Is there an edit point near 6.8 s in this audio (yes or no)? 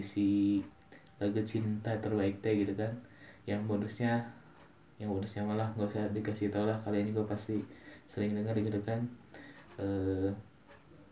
no